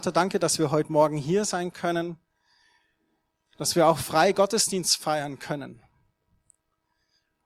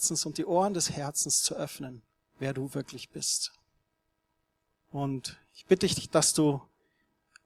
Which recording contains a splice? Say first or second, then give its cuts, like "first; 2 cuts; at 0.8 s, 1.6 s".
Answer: second; 2 cuts; at 2.3 s, 4.8 s